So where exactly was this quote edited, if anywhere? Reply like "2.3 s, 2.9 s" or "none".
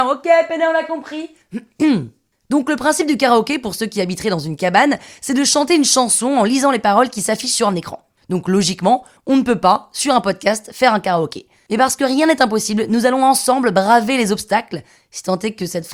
none

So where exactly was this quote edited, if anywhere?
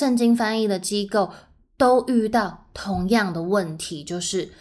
none

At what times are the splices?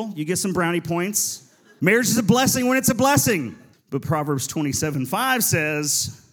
1.8 s, 3.7 s

